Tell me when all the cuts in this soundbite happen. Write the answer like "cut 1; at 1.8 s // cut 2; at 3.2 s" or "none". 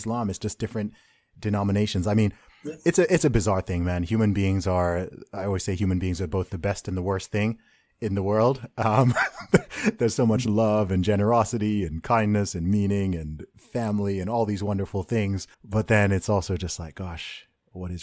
cut 1; at 15.5 s